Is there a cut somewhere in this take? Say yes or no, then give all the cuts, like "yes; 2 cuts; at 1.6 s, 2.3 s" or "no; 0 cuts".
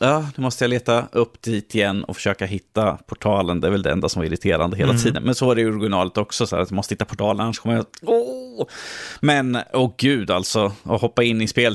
no; 0 cuts